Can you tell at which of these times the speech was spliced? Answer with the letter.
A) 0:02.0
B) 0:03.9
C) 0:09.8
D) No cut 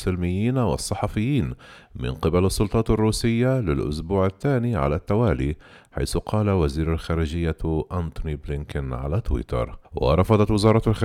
C